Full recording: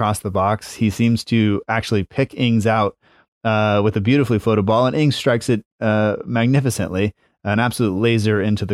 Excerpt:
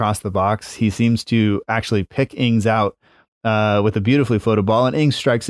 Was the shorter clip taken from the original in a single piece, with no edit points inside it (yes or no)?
yes